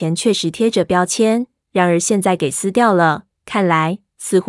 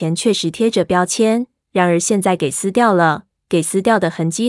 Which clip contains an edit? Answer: first; 1 cut; at 3.3 s

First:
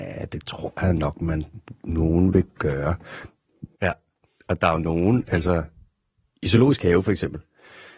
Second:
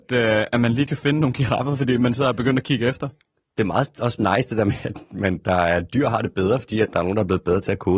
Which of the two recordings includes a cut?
first; 1 cut; at 3.7 s

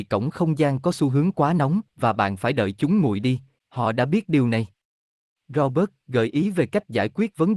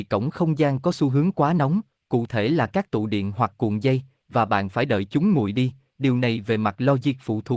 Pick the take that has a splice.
first; 2 cuts; at 1.9 s, 3.6 s

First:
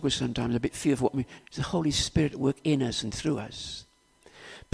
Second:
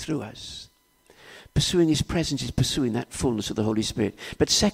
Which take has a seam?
first; 1 cut; at 1.4 s

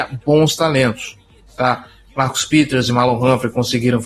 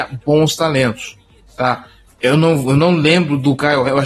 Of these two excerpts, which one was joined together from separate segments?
second; 1 cut; at 2.1 s

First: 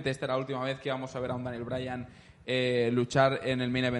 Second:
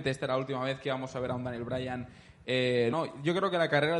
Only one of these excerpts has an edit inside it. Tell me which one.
second; 1 cut; at 2.9 s

